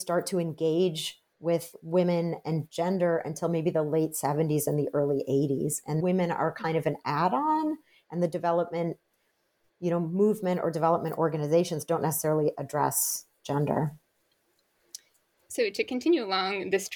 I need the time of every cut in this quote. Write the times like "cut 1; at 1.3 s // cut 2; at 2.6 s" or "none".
cut 1; at 6.0 s